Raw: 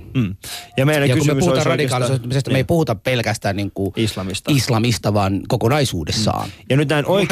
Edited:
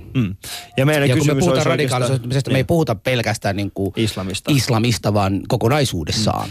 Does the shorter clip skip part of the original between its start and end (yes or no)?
no